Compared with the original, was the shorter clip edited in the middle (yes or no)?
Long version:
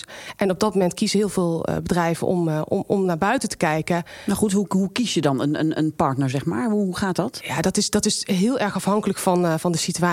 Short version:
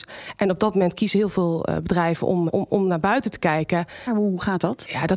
yes